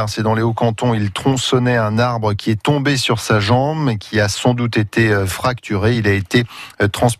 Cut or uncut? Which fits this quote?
uncut